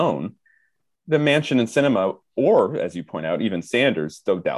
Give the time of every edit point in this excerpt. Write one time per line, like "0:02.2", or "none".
none

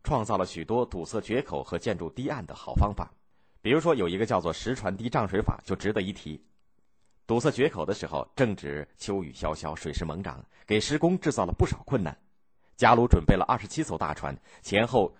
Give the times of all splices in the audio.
none

